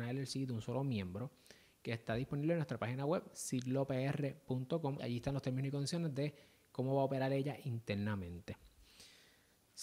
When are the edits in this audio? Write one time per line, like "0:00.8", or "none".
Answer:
0:05.0